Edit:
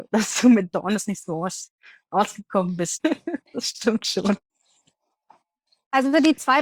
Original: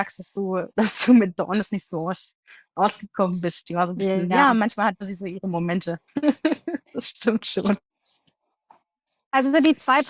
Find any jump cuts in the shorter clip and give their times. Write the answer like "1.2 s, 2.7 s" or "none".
3.0 s